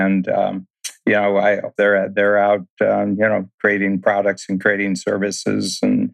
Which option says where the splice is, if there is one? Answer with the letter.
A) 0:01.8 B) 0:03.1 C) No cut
A